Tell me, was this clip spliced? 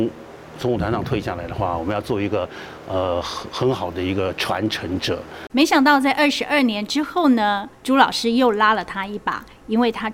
yes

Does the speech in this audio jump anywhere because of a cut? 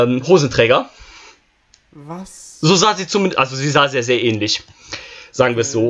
no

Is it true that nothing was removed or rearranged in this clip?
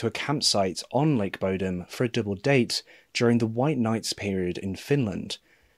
yes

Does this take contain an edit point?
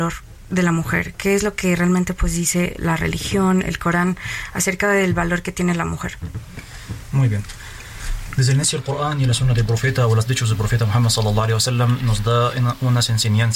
no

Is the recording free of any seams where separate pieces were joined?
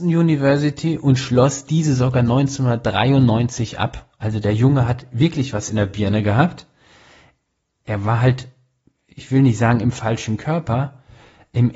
yes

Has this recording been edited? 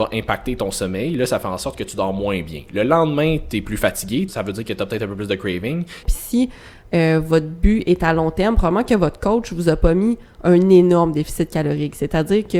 yes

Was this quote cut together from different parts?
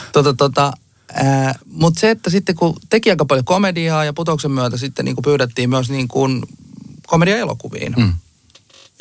yes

